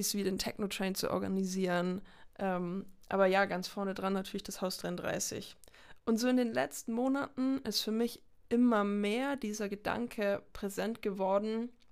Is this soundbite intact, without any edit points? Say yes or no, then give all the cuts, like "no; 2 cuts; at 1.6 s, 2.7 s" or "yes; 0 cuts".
yes; 0 cuts